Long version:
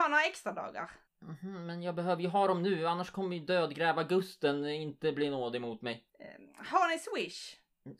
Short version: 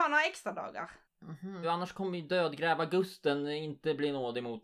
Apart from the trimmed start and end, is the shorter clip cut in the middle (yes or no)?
yes